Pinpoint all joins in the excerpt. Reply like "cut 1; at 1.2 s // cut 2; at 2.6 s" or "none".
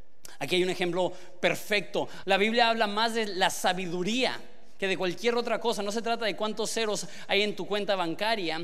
cut 1; at 2.2 s